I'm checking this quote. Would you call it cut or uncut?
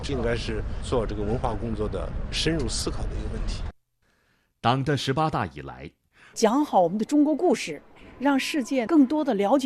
cut